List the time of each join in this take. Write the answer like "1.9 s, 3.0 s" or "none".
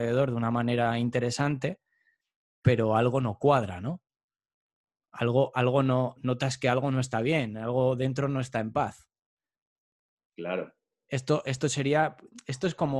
none